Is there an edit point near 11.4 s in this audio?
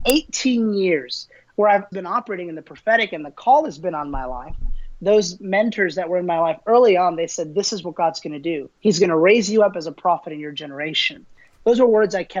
no; 2 cuts; at 1.9 s, 8.8 s

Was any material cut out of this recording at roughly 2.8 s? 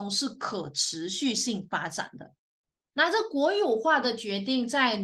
no; 0 cuts

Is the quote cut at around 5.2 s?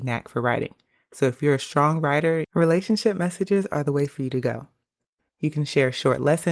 yes; 2 cuts; at 2.4 s, 5.2 s

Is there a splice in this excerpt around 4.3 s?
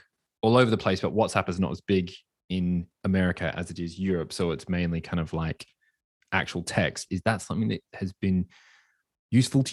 no; 1 cut; at 7.1 s

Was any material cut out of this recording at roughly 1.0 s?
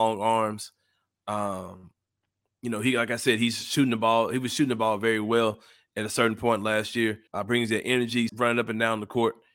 no; 2 cuts; at 7.3 s, 8.3 s

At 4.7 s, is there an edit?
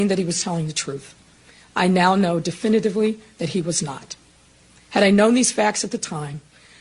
no; 0 cuts

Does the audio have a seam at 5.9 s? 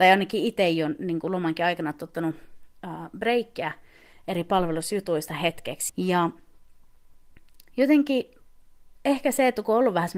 yes; 1 cut; at 5.9 s

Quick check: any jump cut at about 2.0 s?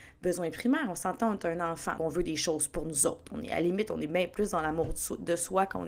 yes; 1 cut; at 2.0 s

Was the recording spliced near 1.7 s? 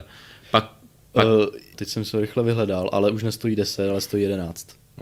yes; 1 cut; at 1.7 s

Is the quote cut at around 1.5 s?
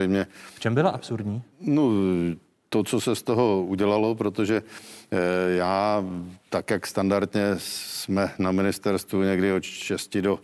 yes; 1 cut; at 1.5 s

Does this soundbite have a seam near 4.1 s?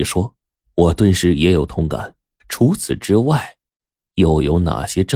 no; 1 cut; at 2.4 s

